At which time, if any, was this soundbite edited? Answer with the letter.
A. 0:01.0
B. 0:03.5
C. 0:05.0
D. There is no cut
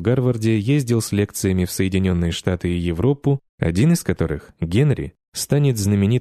B